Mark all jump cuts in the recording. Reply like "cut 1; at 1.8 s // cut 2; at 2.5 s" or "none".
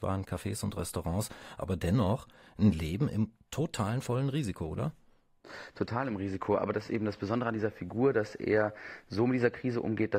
none